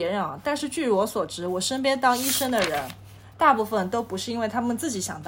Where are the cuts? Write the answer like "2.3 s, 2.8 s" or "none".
none